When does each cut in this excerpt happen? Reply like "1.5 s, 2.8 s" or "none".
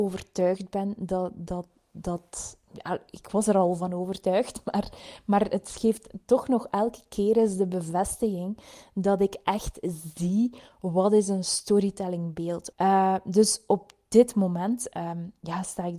12.7 s